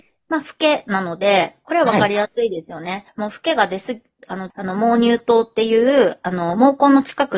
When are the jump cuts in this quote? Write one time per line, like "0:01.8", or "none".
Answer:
0:03.1
0:04.5

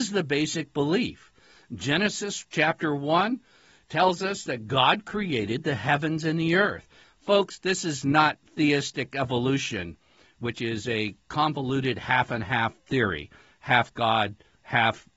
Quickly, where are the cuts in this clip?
0:07.0

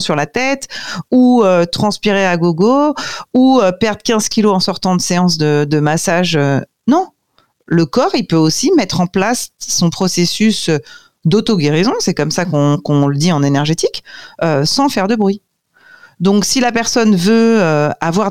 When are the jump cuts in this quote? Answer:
none

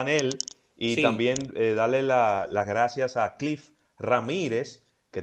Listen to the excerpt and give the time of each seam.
none

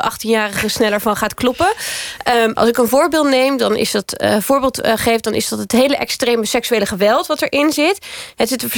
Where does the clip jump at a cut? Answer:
0:02.5

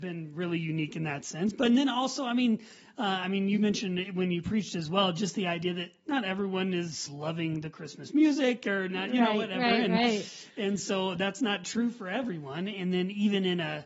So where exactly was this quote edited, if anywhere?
none

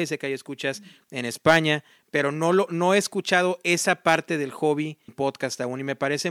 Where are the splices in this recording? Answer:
0:05.1

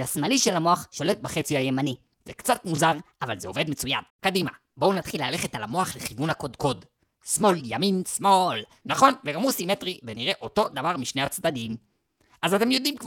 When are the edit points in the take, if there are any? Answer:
0:04.1
0:08.8

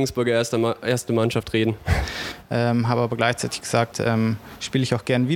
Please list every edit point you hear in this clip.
0:02.4
0:03.9

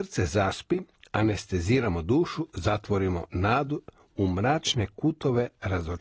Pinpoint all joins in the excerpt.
none

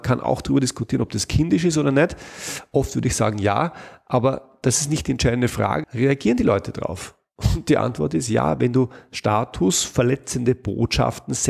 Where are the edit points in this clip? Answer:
0:05.8

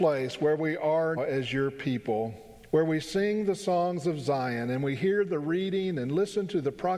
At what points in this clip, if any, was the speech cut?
0:01.2
0:02.7

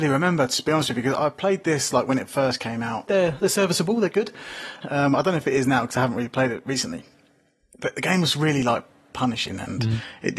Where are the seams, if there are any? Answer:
0:03.1
0:04.8

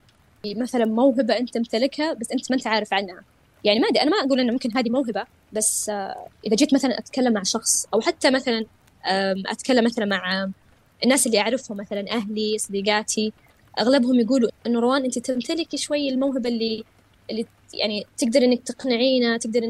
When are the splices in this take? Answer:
0:14.5

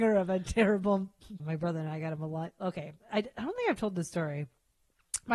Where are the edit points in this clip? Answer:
0:01.4

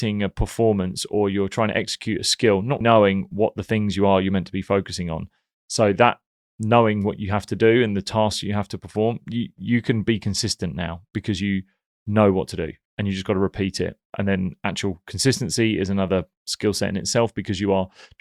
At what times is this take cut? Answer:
0:02.8

